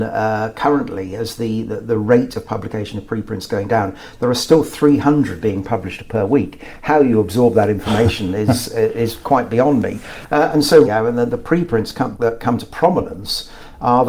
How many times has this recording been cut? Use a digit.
2